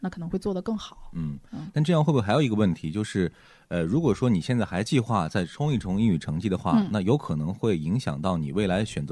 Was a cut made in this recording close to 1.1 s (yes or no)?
no